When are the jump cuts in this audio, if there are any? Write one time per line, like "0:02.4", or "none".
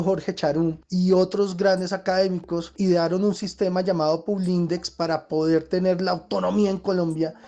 none